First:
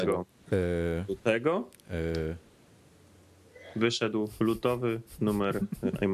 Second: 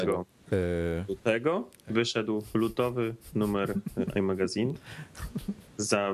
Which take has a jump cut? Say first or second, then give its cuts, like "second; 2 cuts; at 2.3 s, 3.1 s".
second; 1 cut; at 1.9 s